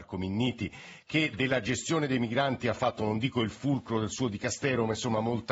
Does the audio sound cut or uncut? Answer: uncut